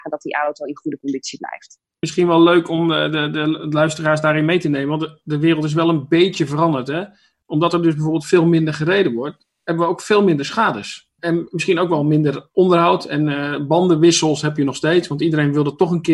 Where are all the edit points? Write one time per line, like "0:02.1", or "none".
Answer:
none